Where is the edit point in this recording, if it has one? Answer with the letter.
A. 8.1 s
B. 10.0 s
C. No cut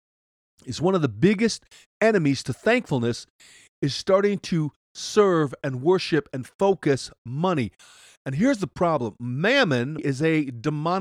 B